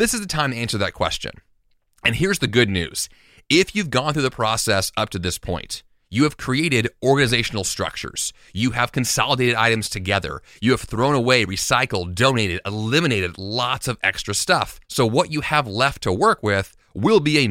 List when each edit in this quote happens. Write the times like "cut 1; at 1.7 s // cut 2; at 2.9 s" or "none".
cut 1; at 14.8 s